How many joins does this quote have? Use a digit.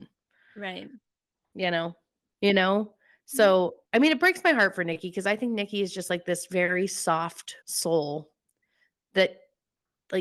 2